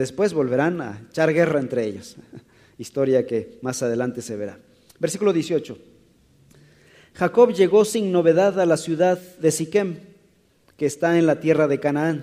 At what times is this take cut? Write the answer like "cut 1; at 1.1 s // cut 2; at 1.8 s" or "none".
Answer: none